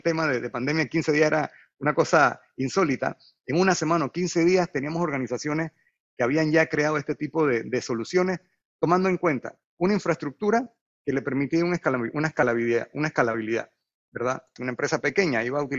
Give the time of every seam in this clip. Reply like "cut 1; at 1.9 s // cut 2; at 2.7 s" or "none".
cut 1; at 14.6 s